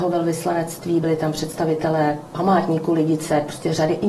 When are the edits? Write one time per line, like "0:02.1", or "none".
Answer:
none